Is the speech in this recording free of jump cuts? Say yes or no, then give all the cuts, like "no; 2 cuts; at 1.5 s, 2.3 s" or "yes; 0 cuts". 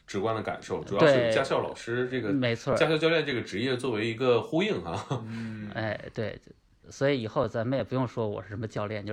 yes; 0 cuts